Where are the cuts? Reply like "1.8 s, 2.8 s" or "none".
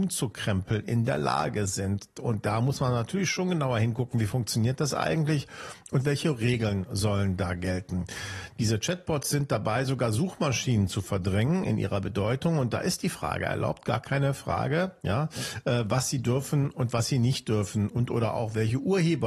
none